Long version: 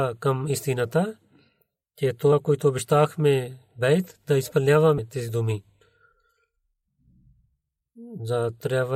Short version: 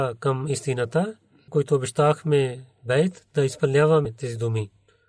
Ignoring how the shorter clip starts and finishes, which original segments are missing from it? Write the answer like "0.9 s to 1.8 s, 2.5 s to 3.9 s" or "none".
1.5 s to 2.4 s